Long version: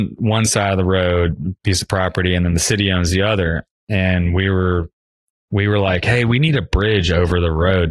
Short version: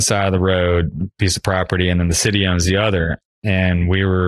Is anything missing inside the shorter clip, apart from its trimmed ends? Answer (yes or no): no